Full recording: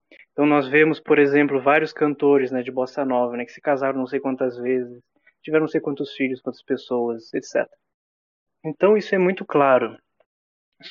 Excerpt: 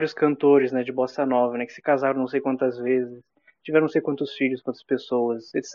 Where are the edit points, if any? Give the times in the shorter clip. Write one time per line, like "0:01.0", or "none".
none